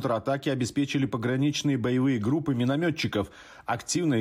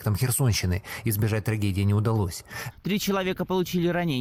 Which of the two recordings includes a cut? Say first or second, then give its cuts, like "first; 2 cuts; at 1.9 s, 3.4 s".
second; 1 cut; at 2.7 s